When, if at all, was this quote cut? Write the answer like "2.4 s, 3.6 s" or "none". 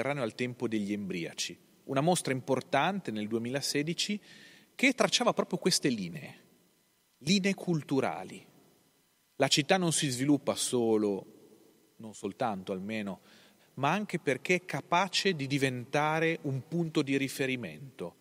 13.6 s